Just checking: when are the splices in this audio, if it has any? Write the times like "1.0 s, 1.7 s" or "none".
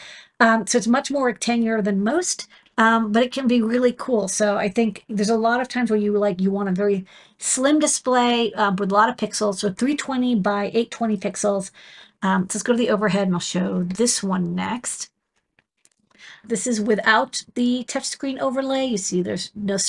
16.5 s